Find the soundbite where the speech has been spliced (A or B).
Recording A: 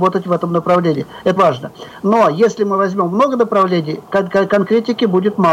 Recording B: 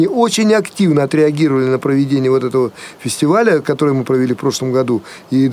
A